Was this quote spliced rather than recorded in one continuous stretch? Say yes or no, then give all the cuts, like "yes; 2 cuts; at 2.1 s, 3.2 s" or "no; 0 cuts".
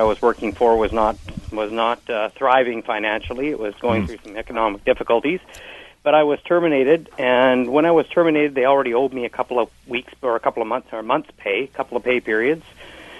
no; 0 cuts